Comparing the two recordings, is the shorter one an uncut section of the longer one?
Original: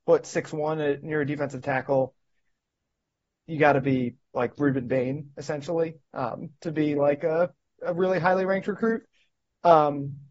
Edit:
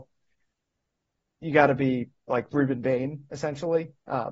yes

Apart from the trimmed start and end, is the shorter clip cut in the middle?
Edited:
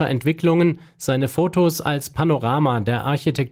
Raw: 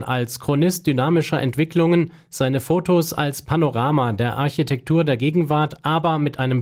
no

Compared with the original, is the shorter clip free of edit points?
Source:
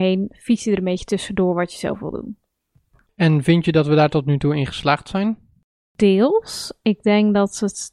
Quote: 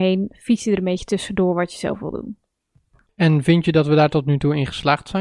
yes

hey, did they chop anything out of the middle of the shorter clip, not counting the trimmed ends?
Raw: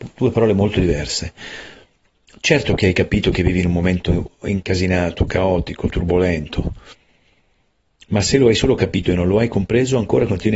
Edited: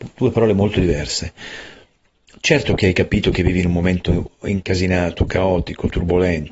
no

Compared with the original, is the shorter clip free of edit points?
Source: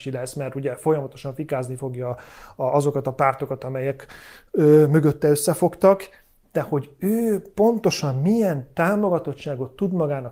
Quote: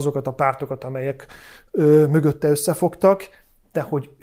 yes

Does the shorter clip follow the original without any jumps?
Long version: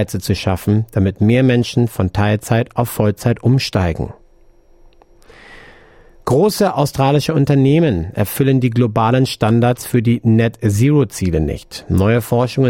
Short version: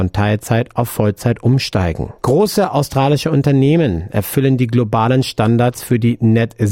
no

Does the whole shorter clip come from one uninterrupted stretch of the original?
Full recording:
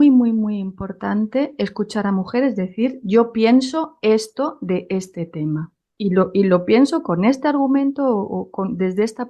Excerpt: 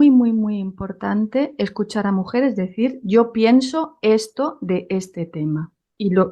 yes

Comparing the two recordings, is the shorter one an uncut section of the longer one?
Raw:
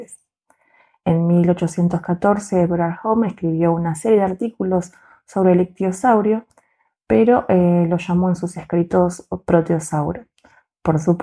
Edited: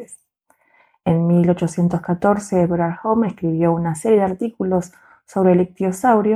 yes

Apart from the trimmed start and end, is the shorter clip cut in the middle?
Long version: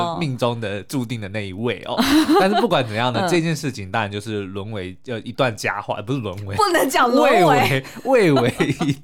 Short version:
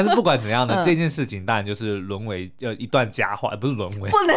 no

